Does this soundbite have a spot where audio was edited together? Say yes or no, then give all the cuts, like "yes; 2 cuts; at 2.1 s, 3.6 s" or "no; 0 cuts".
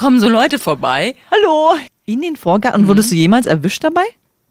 yes; 1 cut; at 1.9 s